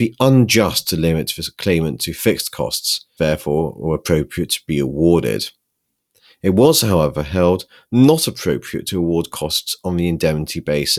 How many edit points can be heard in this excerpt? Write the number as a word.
one